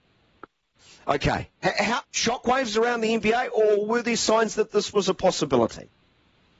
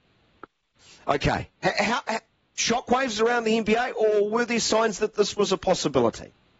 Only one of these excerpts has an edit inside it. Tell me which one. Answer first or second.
first